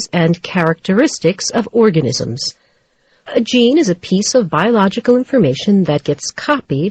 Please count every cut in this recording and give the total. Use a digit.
1